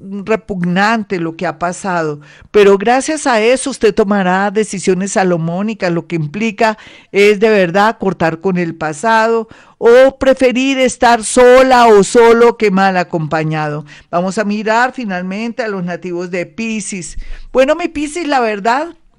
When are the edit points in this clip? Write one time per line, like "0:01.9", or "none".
none